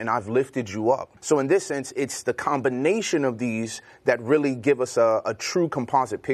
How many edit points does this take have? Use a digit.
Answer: 1